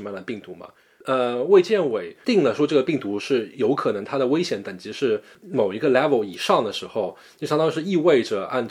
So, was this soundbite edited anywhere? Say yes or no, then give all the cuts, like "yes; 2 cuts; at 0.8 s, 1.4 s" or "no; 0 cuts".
yes; 1 cut; at 3.2 s